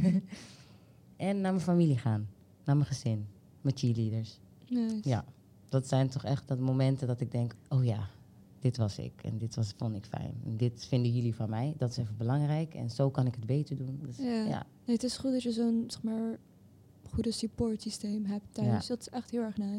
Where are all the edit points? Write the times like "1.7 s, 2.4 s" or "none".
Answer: 7.6 s, 14.0 s